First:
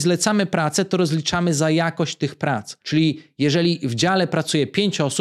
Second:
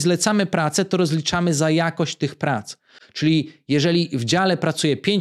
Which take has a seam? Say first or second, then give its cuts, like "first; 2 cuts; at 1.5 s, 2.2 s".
first; 1 cut; at 2.8 s